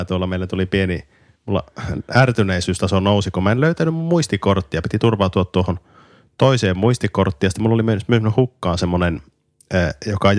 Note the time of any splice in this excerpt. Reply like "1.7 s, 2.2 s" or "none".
none